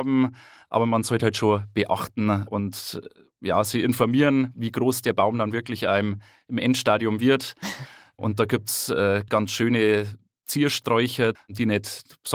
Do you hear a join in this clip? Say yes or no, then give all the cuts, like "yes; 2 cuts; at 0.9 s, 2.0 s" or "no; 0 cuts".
yes; 2 cuts; at 9.3 s, 11.4 s